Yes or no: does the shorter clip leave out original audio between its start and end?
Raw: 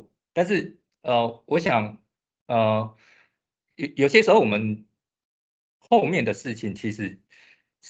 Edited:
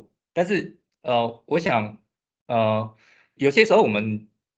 yes